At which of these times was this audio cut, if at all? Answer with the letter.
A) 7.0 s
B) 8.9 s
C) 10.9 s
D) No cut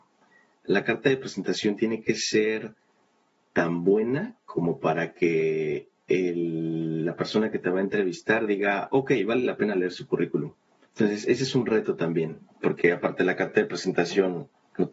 C